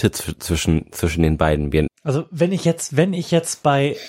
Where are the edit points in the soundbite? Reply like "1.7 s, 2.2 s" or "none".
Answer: 1.9 s

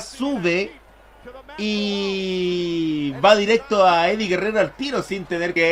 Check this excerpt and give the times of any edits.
none

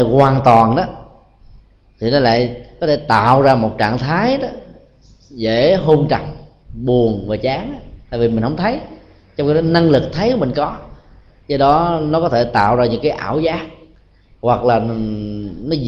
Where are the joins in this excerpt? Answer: none

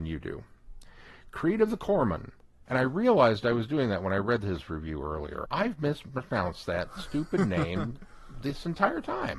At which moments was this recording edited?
2.7 s, 5.4 s

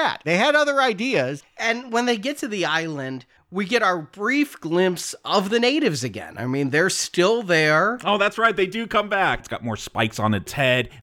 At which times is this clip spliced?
1.4 s, 9.4 s

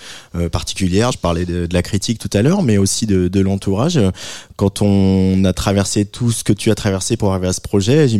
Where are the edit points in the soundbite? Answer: 1.1 s

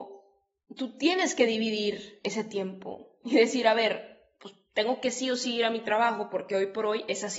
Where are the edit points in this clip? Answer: none

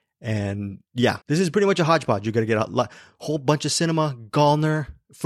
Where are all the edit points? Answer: 1.2 s

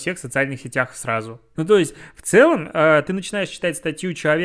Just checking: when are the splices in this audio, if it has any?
1.5 s

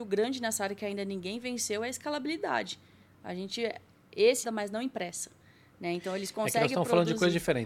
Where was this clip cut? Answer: 4.4 s

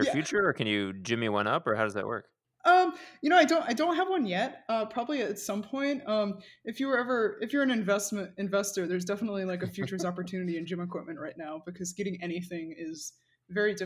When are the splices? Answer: none

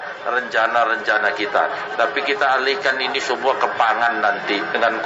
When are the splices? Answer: none

